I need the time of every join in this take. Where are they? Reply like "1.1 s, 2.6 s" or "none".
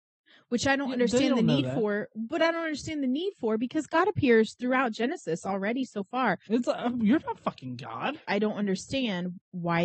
6.5 s, 8.2 s